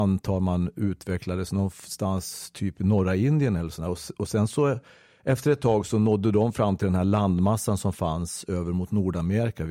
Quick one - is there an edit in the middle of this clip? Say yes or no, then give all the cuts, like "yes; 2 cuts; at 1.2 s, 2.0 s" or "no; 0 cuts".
no; 0 cuts